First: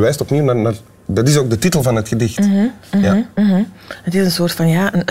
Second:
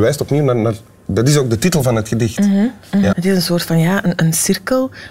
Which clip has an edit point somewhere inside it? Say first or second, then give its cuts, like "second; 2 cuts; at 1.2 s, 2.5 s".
second; 1 cut; at 3.1 s